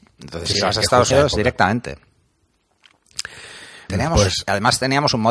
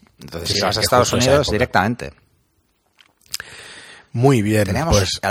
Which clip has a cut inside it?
first; 2 cuts; at 1.1 s, 3.9 s

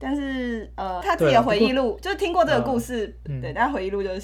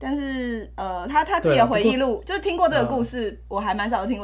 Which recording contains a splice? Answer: first; 2 cuts; at 1.0 s, 3.3 s

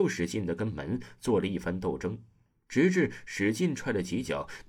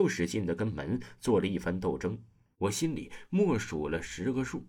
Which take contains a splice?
second; 1 cut; at 2.5 s

